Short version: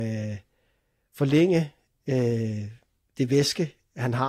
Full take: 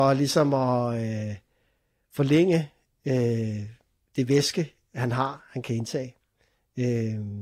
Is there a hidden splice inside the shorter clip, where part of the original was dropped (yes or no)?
no